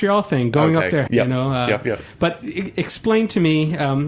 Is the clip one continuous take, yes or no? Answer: no